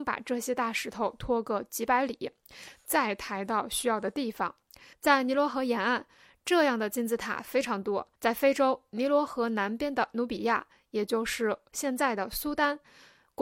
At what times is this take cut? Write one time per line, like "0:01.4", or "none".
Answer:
0:04.9
0:08.2